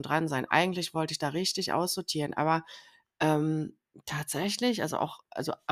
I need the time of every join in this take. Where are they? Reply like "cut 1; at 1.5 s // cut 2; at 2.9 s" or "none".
none